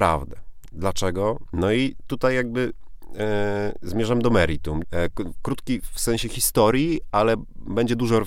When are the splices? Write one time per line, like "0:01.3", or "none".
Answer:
0:01.5
0:04.8

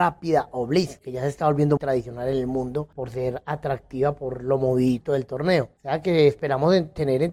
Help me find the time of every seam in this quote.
0:01.8

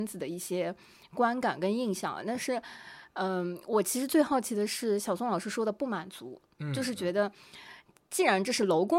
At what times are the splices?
none

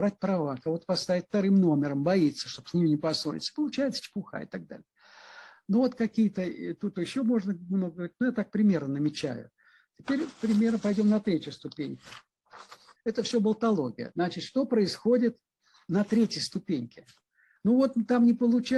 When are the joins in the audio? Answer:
0:13.0
0:14.1
0:17.6

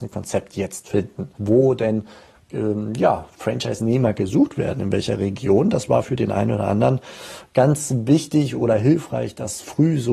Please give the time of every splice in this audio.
0:01.4

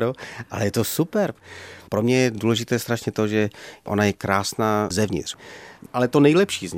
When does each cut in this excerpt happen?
0:05.9

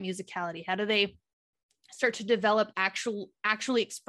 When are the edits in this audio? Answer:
none

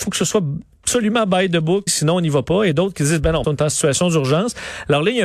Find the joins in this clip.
0:01.9
0:03.4

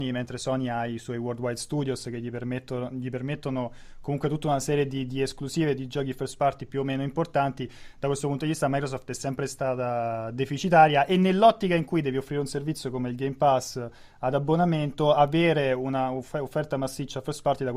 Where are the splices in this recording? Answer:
none

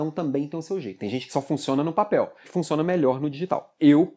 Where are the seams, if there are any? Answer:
0:02.4

